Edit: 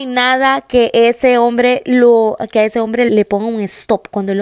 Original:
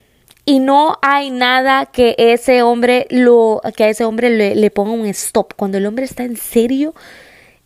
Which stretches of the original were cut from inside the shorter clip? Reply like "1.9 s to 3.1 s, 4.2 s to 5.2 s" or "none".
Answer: 4.3 s to 4.5 s